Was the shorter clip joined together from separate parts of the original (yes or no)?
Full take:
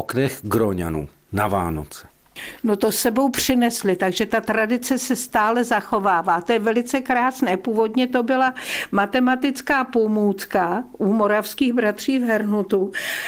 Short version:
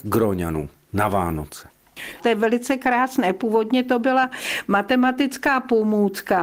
yes